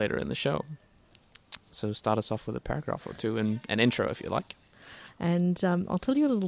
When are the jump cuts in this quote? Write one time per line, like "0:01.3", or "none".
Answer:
0:05.1